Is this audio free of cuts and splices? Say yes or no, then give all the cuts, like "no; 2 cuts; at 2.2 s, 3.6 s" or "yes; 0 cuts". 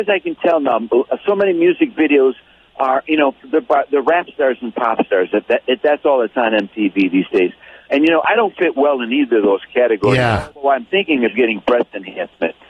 yes; 0 cuts